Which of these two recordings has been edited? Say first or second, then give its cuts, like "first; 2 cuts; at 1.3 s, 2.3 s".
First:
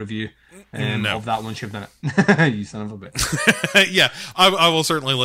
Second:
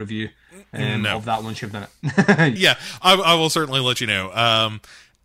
second; 1 cut; at 2.6 s